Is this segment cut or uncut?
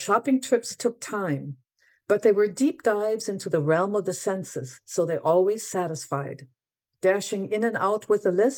cut